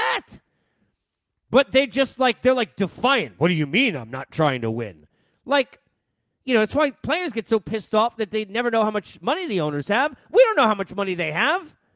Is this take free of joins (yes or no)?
yes